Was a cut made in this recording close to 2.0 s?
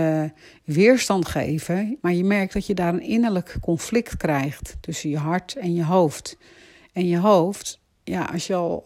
yes; 1 cut; at 2.0 s

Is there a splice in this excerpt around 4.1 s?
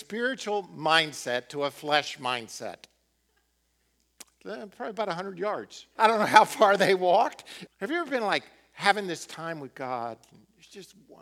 no; 2 cuts; at 6.0 s, 7.7 s

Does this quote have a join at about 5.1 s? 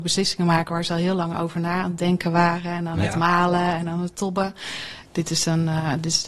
yes; 1 cut; at 5.1 s

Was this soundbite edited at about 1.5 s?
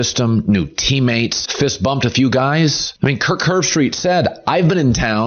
yes; 1 cut; at 1.5 s

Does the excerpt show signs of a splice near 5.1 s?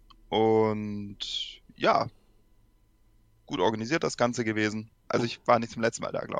yes; 1 cut; at 5.1 s

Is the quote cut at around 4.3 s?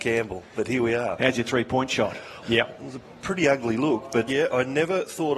yes; 2 cuts; at 2.4 s, 4.3 s

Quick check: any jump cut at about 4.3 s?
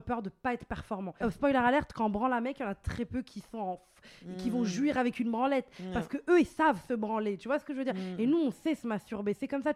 no; 1 cut; at 1.2 s

